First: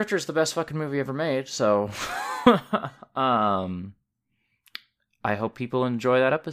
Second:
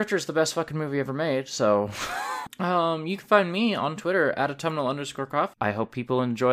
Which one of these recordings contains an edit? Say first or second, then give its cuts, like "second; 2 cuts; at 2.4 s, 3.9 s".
second; 2 cuts; at 2.5 s, 5.5 s